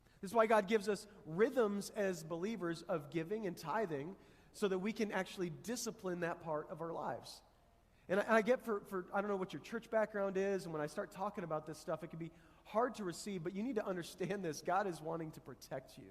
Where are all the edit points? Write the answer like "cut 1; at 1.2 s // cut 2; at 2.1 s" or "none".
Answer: none